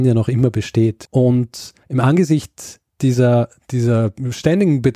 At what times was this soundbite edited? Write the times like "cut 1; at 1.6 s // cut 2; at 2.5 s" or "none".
cut 1; at 1.8 s